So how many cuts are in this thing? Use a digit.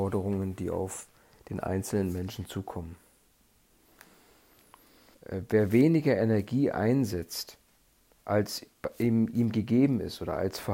1